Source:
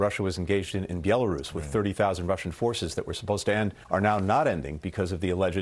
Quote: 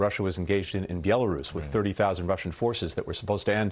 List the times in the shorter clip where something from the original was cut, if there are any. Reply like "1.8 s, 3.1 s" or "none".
none